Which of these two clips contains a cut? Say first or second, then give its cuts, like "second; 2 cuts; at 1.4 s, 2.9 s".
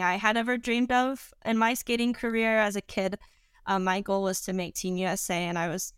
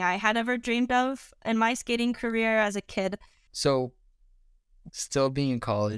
second; 2 cuts; at 3.5 s, 4.9 s